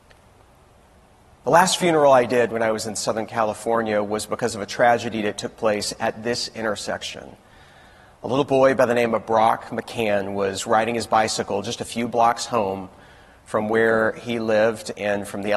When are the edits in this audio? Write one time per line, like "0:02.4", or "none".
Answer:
none